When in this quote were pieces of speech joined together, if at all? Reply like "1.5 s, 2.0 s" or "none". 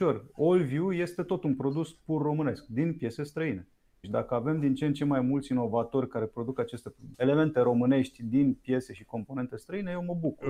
4.0 s, 7.1 s